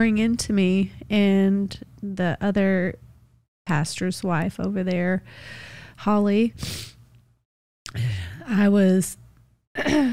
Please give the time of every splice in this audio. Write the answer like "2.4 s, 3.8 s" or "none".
none